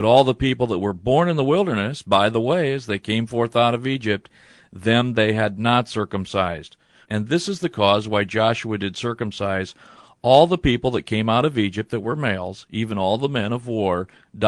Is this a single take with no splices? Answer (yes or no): no